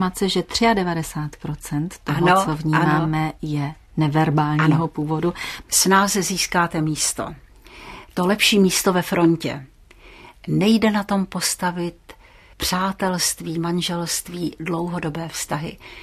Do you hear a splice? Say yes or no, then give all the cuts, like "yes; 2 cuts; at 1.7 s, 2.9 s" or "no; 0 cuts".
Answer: yes; 1 cut; at 5.6 s